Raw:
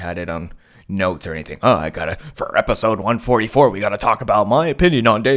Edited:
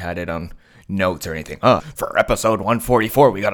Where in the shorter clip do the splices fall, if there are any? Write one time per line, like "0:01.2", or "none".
0:01.8

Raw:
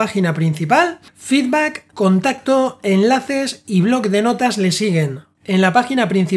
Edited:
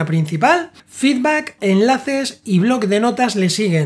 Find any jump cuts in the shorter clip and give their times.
0:01.6

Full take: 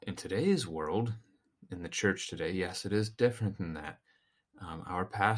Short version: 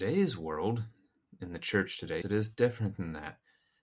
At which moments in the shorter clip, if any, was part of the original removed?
0:02.2

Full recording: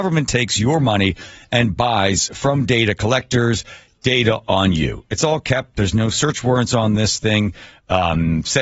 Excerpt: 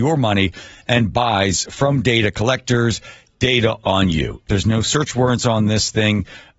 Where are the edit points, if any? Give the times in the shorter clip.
0:04.4

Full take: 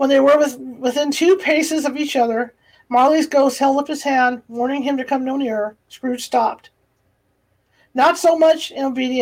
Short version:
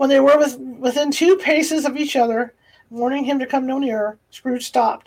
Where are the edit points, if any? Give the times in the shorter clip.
0:02.9

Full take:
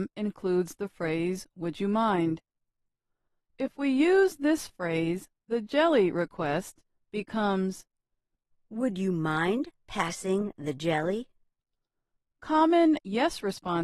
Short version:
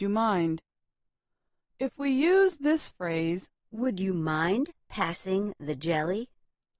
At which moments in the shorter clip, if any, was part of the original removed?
0:03.6

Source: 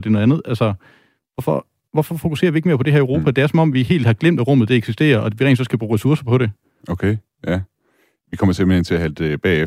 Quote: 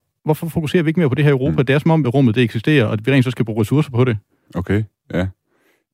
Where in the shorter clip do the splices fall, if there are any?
0:02.0

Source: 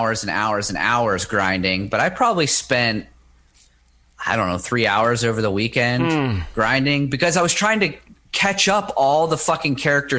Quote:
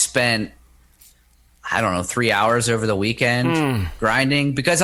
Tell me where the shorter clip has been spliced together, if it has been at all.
none

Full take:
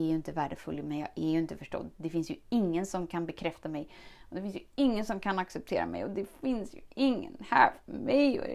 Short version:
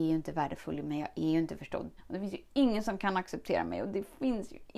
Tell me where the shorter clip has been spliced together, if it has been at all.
0:02.0

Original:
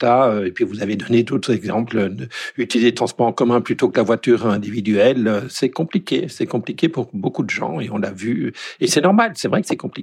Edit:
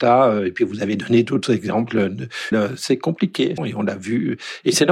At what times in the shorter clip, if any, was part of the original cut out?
0:02.5
0:03.6

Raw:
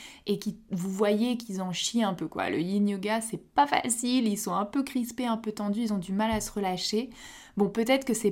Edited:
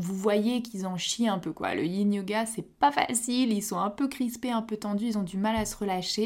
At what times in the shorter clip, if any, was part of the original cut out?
none

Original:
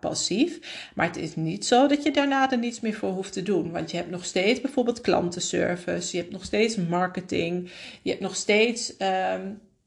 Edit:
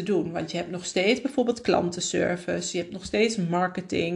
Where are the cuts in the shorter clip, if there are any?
none

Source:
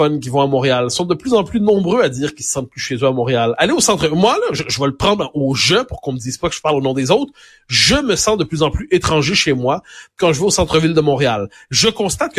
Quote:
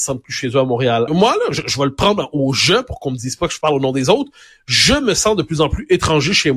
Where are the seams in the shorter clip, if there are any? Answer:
0:01.1

